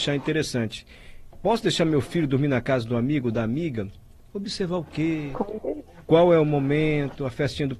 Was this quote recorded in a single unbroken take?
no; 1 cut; at 1.3 s

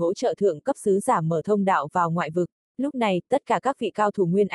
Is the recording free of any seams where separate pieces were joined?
no; 1 cut; at 2.6 s

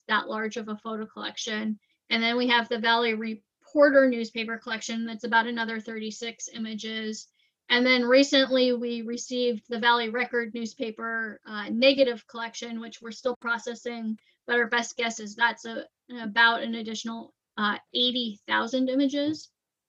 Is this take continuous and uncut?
no; 1 cut; at 1.9 s

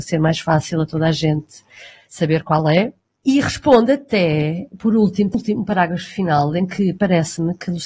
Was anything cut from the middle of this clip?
yes; 1 cut; at 5.3 s

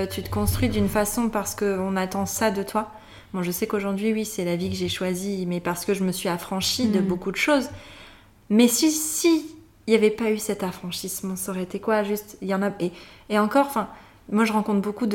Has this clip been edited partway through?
no; 0 cuts

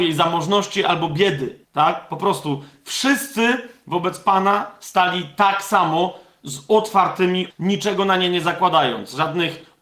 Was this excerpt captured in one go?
no; 2 cuts; at 1.6 s, 7.5 s

